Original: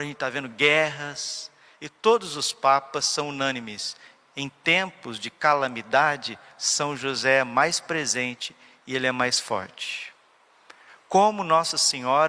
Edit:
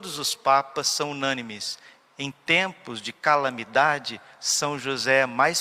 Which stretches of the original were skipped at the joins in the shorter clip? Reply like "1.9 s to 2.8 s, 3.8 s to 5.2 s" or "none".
none